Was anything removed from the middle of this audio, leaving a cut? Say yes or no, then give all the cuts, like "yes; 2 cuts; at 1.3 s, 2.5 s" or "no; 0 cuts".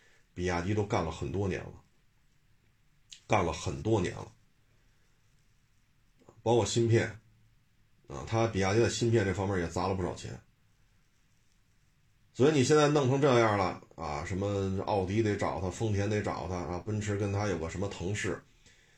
no; 0 cuts